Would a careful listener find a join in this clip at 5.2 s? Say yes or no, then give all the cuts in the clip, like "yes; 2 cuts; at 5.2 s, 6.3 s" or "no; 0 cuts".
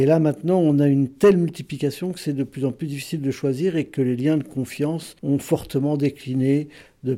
yes; 1 cut; at 5.2 s